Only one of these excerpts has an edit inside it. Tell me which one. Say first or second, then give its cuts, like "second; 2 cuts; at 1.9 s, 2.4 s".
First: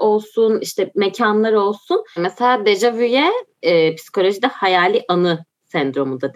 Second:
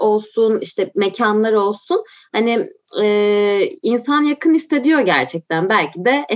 first; 1 cut; at 2.2 s